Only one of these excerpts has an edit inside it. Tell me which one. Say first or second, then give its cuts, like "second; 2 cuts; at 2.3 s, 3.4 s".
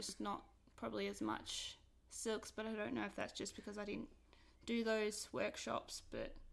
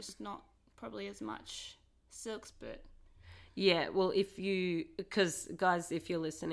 second; 1 cut; at 2.5 s